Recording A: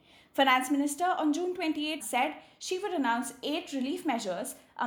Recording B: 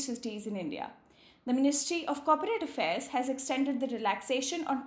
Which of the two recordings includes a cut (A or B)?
A